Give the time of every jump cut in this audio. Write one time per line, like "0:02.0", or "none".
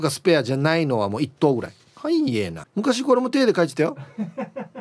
0:02.6